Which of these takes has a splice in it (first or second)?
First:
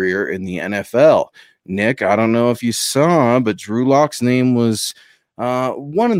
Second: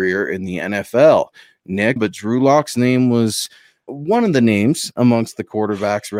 second